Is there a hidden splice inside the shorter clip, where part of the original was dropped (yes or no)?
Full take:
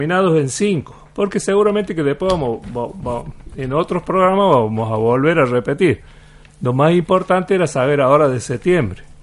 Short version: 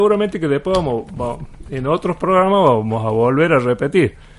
yes